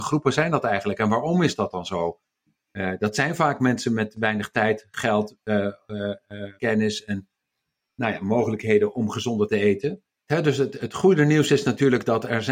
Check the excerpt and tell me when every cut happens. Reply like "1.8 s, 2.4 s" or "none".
6.6 s, 10.3 s

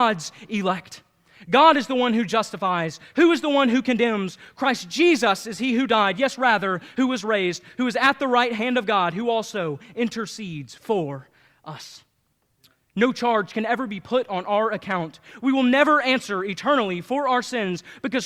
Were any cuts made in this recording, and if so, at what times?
none

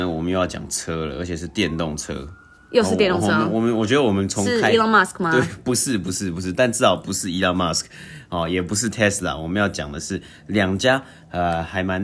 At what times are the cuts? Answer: none

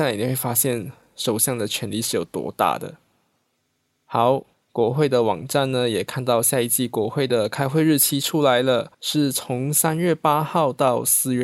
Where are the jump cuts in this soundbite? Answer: 4.5 s, 8.9 s

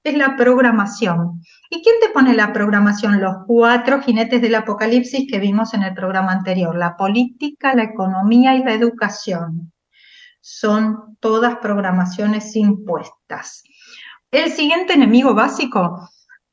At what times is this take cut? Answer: 7.7 s, 14.3 s

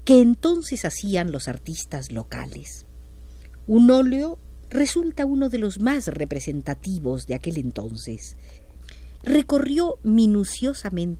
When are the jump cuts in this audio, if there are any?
4.6 s, 9.2 s

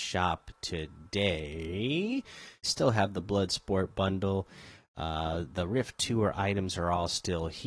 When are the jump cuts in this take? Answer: 2.6 s

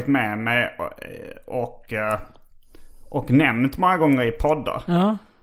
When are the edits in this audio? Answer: none

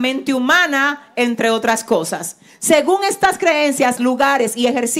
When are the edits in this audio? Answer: 4.0 s

